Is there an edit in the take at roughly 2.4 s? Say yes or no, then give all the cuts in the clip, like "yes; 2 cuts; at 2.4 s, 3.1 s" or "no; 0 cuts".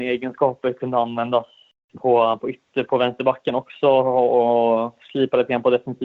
no; 0 cuts